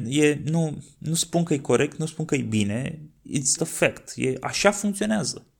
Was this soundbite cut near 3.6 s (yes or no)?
yes